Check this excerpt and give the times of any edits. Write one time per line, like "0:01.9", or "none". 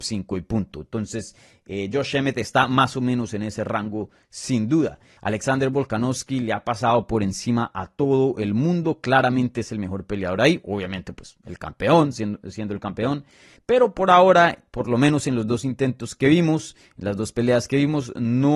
0:05.2
0:13.6